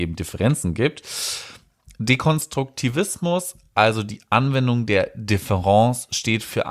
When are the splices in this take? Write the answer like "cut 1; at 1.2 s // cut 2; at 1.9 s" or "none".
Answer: none